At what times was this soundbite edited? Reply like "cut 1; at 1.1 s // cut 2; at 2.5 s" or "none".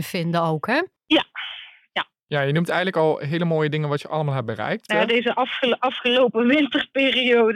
cut 1; at 1.0 s // cut 2; at 4.9 s